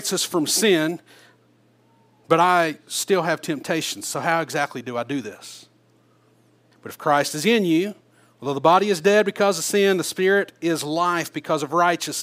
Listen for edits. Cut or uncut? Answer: cut